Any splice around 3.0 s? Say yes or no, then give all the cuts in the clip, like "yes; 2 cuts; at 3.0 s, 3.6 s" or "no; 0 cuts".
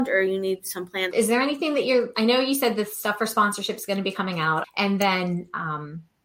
no; 2 cuts; at 1.1 s, 4.6 s